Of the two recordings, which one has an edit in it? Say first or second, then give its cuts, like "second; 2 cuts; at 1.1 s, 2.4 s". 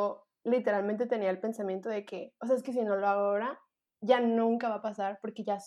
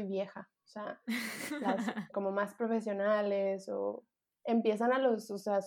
second; 1 cut; at 2.1 s